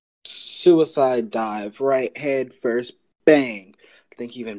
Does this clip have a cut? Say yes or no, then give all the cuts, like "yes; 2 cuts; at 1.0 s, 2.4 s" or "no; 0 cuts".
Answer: no; 0 cuts